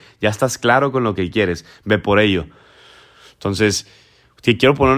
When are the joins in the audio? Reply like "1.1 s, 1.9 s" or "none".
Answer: none

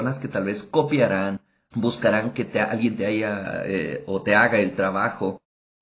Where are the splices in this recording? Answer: 1.7 s

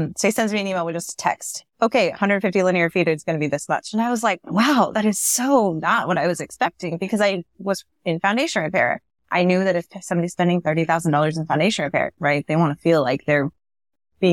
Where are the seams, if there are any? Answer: 12.2 s

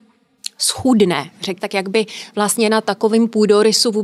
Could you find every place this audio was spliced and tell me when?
1.6 s

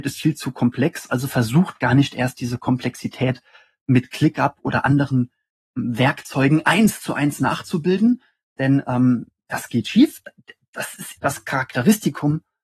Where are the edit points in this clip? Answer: 11.2 s

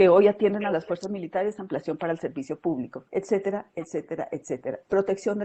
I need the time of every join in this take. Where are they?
3.1 s

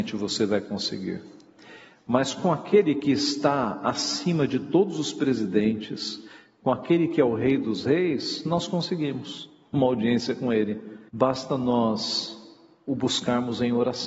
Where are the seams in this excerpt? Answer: 11.1 s

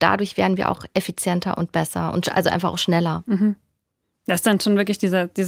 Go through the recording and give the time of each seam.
none

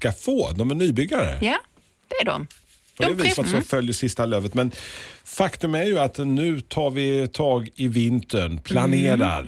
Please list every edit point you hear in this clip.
3.4 s

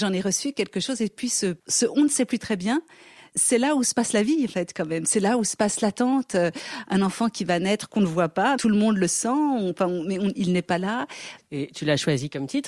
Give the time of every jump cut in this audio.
8.6 s, 11.5 s

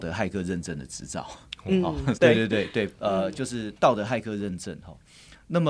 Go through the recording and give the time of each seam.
2.1 s

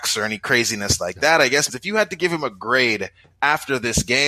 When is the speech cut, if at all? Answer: 1.7 s

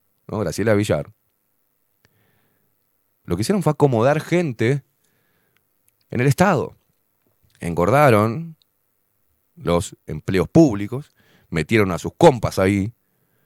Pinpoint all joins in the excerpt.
3.2 s

